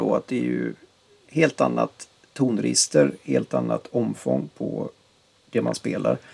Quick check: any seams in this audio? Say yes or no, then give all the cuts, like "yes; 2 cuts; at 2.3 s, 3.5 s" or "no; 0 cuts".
no; 0 cuts